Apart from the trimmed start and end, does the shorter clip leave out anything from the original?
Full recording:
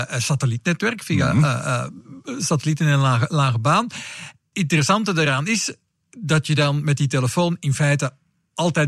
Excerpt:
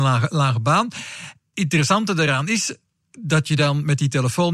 no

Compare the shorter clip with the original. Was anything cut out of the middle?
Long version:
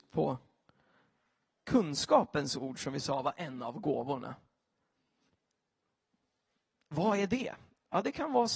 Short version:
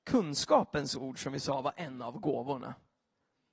no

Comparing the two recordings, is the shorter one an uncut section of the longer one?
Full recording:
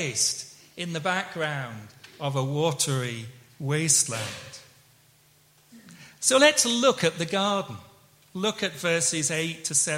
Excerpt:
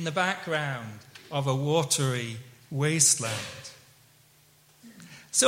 yes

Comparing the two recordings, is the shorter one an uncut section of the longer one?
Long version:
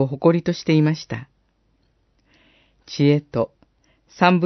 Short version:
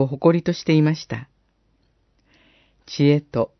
yes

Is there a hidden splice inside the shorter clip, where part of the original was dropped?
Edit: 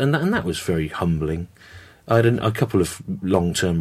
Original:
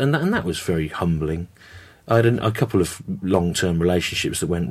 no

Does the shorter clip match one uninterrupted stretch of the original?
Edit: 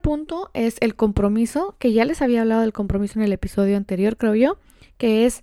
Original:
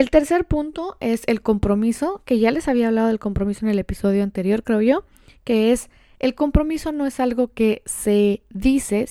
yes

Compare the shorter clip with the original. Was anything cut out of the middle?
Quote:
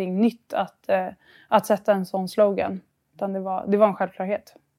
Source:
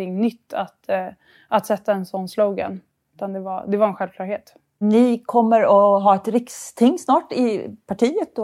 no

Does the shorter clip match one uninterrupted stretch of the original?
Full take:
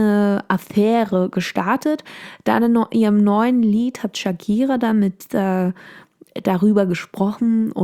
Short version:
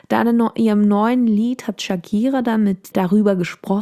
no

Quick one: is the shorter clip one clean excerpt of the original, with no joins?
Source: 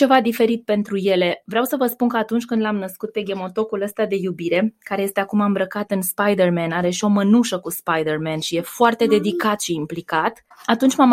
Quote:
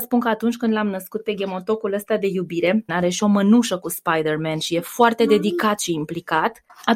no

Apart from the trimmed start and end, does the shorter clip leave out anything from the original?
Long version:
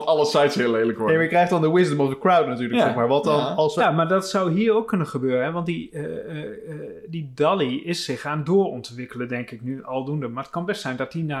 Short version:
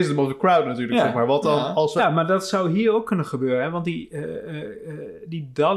no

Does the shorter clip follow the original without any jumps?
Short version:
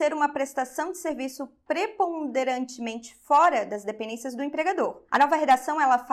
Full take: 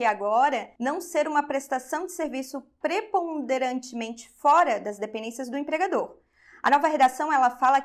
no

